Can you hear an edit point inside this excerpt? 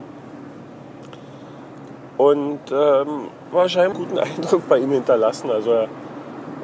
yes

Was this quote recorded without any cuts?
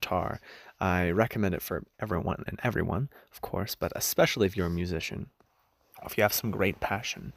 no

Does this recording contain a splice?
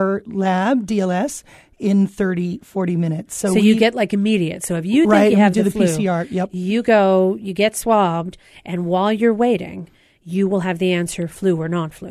no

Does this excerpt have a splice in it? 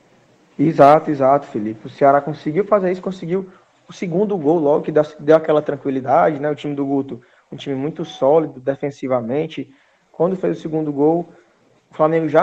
no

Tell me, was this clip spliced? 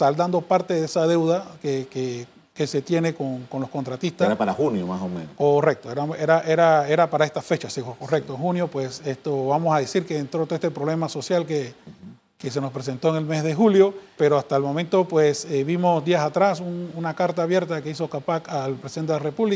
yes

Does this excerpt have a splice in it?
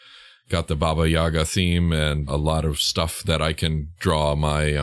yes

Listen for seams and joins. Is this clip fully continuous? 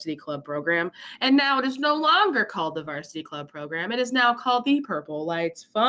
yes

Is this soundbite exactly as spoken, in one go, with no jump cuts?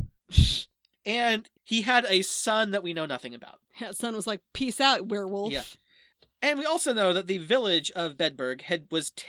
yes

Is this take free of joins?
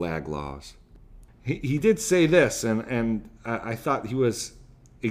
no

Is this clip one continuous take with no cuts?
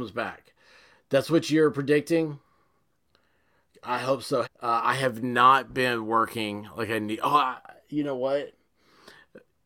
no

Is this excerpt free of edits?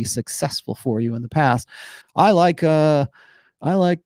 no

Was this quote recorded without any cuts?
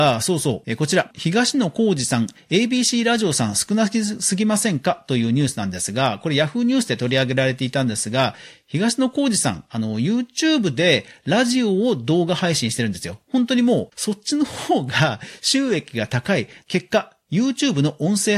no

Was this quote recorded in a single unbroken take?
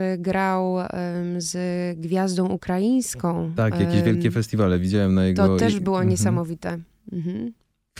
yes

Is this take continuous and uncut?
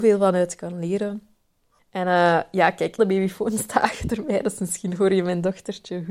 no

